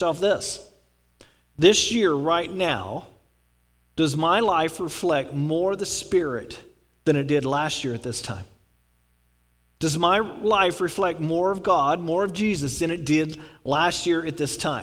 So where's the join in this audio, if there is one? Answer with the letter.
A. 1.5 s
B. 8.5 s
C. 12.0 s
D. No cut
D